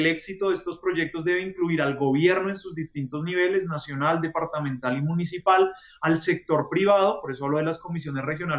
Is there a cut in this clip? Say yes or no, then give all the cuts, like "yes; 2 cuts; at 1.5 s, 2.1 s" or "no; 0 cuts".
no; 0 cuts